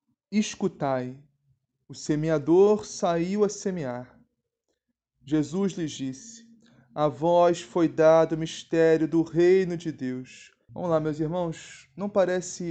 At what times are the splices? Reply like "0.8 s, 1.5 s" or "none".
10.7 s